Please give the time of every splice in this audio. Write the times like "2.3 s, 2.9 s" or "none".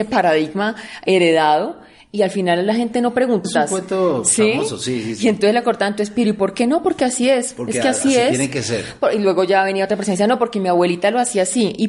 3.4 s